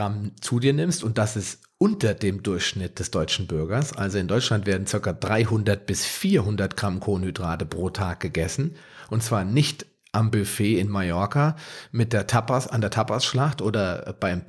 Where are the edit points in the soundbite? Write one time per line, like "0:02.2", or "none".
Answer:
none